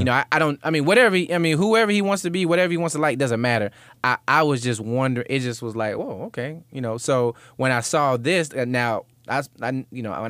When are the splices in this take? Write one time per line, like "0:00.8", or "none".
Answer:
none